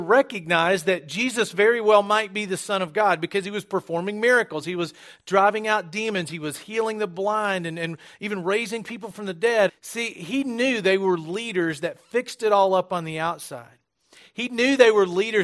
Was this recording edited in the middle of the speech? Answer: yes; 1 cut; at 9.7 s

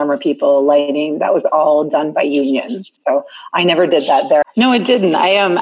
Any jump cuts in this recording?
yes; 2 cuts; at 3.0 s, 4.4 s

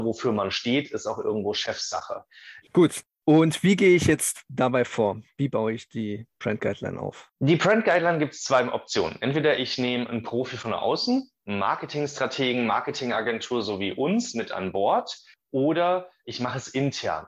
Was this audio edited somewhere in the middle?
yes; 2 cuts; at 2.6 s, 7.4 s

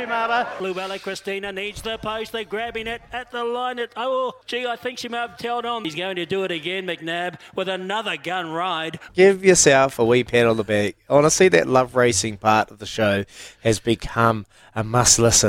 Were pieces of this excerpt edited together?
yes; 2 cuts; at 5.4 s, 9.1 s

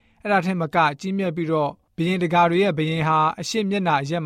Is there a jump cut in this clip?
no; 0 cuts

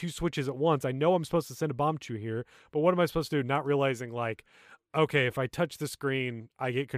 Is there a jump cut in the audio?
no; 0 cuts

